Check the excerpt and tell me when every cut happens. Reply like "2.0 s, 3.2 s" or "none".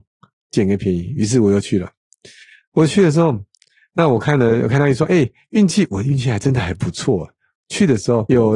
none